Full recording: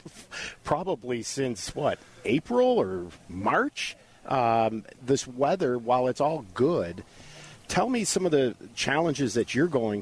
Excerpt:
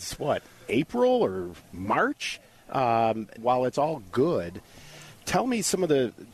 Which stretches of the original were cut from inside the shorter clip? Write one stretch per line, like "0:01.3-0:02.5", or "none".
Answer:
0:04.9-0:05.8